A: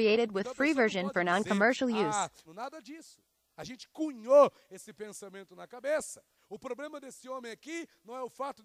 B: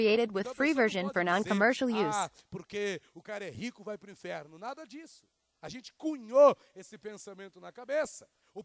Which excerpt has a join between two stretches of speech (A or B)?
A